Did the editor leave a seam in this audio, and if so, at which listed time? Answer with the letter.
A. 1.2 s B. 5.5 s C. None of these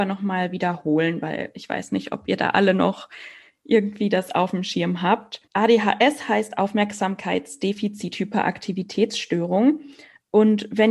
B